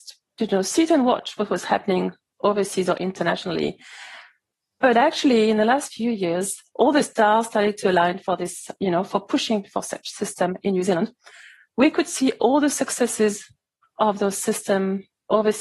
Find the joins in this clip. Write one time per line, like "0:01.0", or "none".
none